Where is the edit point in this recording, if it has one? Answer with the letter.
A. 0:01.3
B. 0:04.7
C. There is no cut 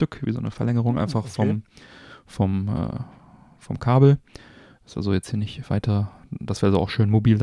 C